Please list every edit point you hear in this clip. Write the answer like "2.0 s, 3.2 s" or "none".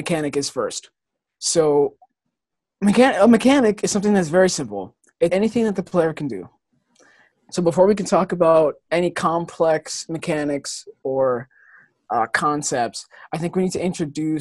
5.3 s, 7.3 s